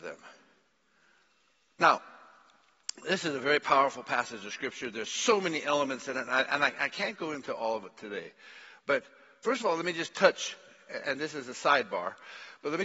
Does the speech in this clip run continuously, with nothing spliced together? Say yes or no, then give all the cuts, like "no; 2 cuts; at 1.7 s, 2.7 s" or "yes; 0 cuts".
yes; 0 cuts